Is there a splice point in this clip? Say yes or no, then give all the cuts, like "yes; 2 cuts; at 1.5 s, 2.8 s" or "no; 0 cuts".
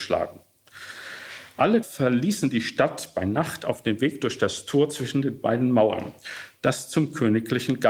yes; 1 cut; at 1.8 s